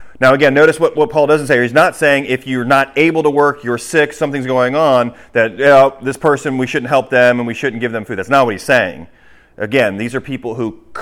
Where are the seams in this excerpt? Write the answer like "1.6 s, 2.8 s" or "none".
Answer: none